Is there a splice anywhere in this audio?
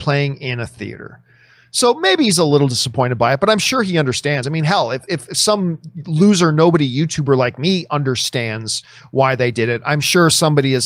no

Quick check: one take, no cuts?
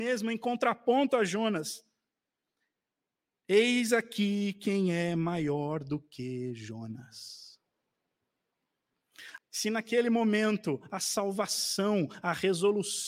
no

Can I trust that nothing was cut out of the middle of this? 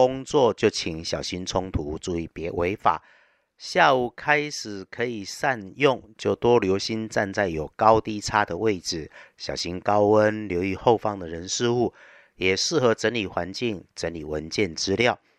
yes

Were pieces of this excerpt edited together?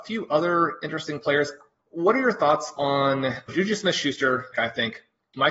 yes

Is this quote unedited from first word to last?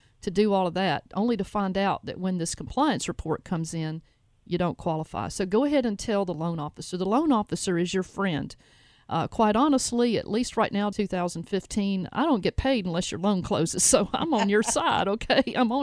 no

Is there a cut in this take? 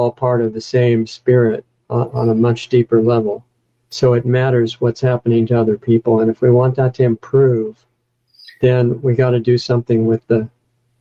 no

